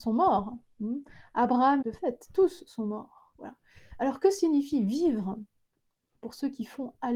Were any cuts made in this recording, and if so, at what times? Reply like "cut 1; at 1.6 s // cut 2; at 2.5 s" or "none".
cut 1; at 1.8 s